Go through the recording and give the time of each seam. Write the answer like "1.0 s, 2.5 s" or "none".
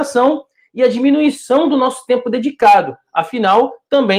none